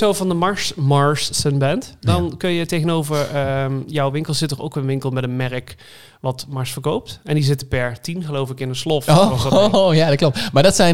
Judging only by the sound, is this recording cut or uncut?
uncut